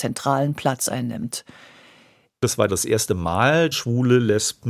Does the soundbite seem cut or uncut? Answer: cut